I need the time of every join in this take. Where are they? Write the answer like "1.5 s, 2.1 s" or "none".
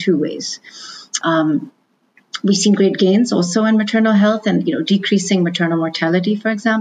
1.2 s

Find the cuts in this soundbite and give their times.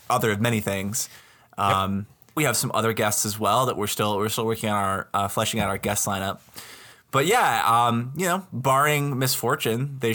2.4 s

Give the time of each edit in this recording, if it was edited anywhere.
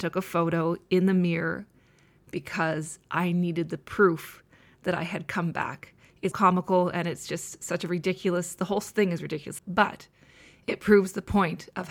6.3 s, 9.6 s

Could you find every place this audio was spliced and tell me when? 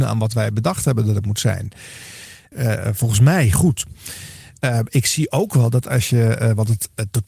2.5 s

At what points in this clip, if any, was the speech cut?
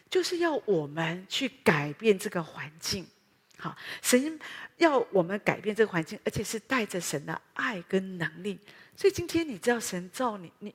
none

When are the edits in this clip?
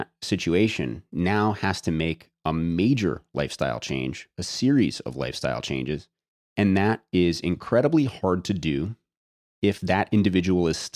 none

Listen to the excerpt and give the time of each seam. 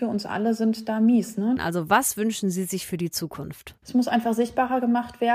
1.6 s

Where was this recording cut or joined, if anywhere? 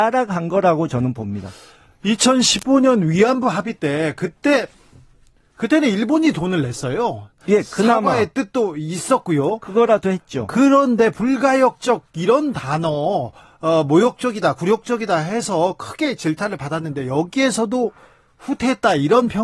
none

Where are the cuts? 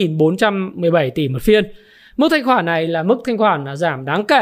none

